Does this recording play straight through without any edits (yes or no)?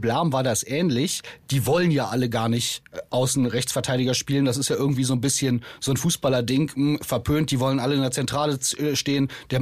yes